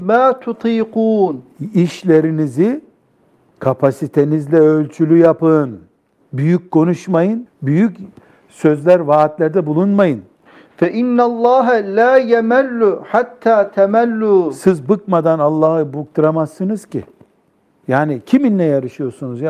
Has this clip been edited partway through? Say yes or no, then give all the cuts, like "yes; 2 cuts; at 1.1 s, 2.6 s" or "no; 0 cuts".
yes; 1 cut; at 7.5 s